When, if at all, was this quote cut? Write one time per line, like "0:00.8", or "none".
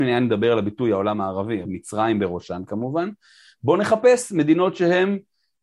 0:01.6